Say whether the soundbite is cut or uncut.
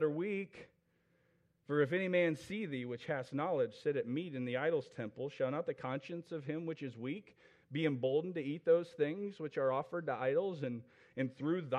uncut